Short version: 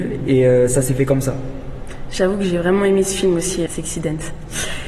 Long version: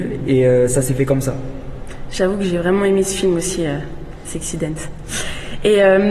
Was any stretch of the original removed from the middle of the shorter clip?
yes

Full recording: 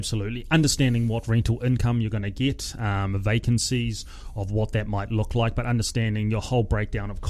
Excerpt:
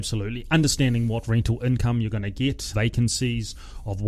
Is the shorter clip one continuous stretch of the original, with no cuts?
no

